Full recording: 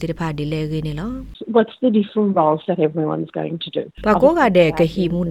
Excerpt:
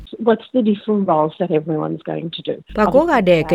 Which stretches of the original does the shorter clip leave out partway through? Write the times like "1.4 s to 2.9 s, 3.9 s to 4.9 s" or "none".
none